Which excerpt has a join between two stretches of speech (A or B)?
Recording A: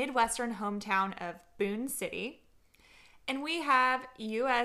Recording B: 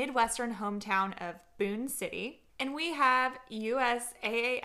B